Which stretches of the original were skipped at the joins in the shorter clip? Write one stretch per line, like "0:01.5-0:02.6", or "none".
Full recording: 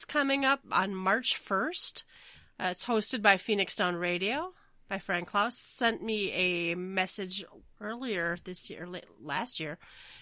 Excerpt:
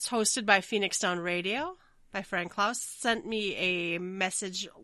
none